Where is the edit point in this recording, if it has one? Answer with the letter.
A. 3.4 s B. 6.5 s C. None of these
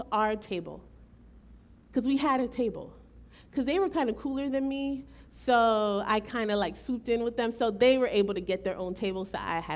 C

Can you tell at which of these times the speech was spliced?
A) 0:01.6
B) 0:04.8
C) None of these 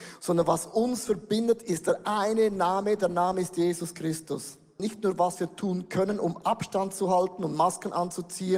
B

